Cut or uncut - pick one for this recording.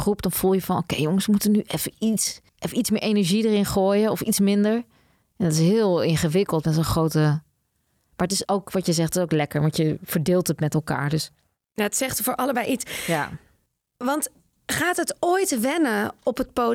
cut